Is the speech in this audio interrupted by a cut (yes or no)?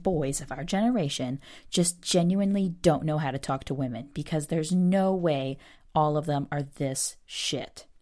no